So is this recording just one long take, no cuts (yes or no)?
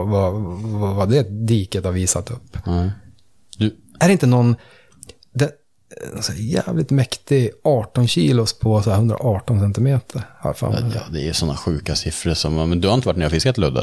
yes